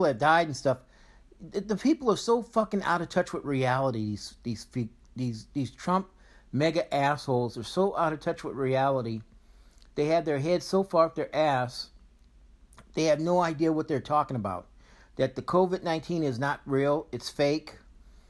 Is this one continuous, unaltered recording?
yes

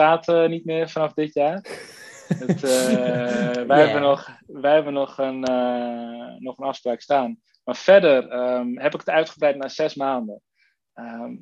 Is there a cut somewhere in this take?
no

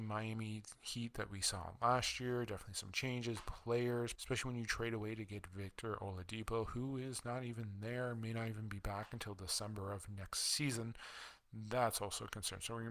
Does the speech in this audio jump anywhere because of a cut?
yes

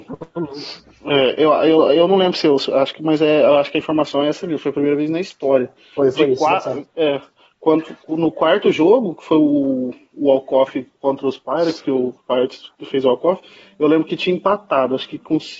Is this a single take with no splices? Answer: yes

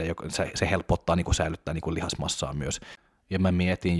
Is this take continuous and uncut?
yes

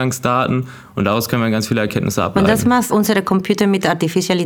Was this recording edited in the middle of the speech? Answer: no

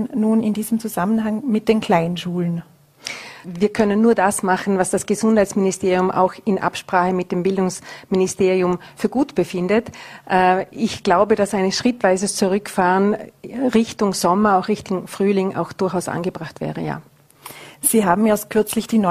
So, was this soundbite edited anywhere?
yes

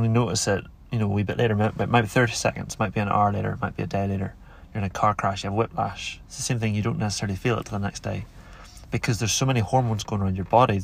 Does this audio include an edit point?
no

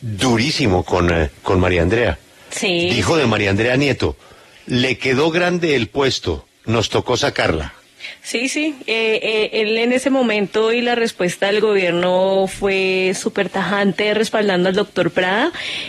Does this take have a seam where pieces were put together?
yes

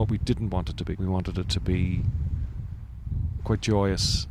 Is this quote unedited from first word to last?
no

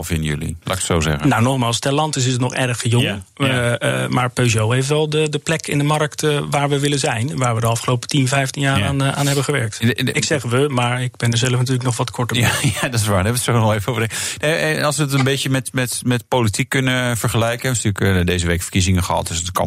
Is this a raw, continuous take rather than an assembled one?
yes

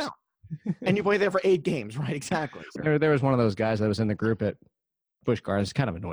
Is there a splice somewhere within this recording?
yes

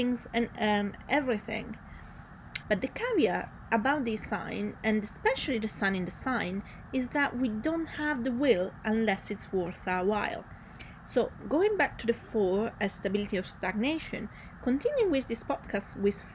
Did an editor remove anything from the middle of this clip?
yes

